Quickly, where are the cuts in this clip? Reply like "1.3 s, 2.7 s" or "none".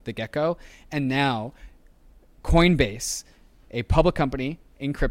none